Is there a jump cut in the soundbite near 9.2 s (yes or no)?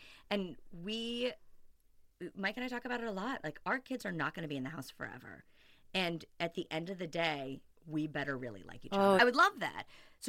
yes